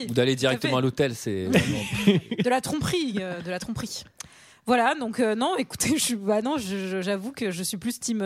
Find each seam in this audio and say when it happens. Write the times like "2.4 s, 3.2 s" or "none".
none